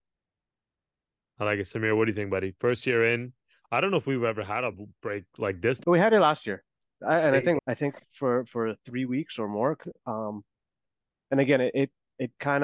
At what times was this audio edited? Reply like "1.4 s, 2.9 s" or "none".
5.8 s, 7.6 s